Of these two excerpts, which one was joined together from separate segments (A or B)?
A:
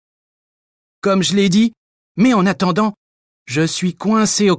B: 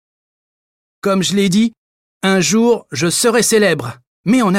A